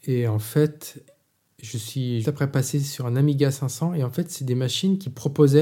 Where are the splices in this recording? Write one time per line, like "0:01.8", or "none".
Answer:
0:02.2

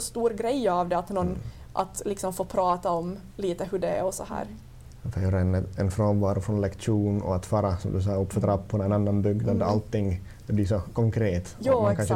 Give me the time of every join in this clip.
none

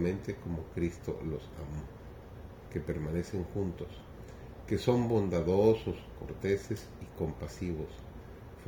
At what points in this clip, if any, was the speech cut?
0:02.7

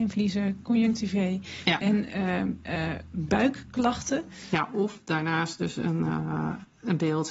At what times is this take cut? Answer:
none

